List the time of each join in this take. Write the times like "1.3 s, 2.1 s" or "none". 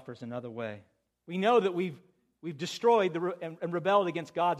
1.1 s